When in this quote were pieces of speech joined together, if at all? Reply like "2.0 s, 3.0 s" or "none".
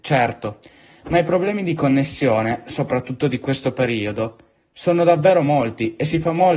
none